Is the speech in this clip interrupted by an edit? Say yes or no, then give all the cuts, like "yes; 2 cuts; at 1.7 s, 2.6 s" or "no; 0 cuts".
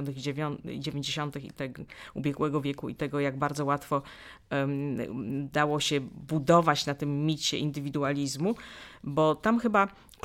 no; 0 cuts